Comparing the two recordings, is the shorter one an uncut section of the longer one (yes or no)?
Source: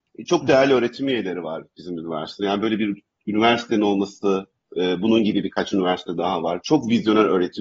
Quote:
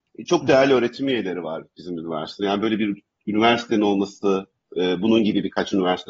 yes